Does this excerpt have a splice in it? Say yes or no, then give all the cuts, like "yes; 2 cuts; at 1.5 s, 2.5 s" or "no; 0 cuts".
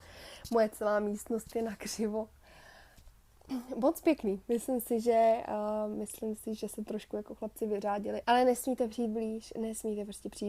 yes; 1 cut; at 8.2 s